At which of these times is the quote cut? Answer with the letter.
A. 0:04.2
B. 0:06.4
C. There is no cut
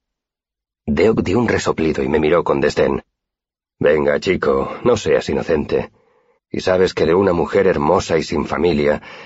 B